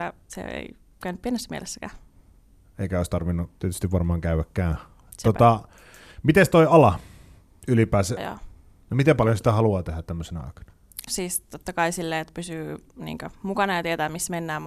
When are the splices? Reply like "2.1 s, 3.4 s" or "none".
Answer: 8.2 s, 11.1 s